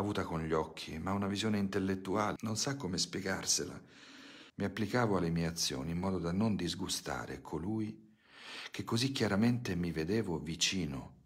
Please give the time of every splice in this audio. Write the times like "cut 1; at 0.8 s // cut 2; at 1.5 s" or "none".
cut 1; at 2.4 s // cut 2; at 4.5 s